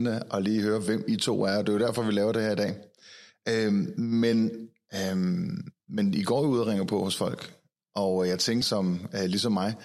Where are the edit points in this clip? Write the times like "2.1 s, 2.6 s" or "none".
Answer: 5.8 s, 8.6 s